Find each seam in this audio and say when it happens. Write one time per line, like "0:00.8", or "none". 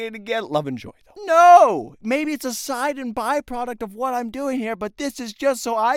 0:01.2